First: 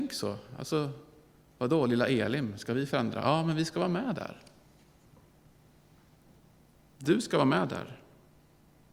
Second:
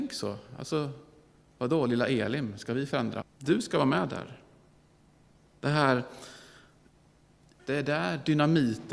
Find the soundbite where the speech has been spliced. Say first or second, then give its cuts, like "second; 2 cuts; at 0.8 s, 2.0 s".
second; 2 cuts; at 3.2 s, 7.6 s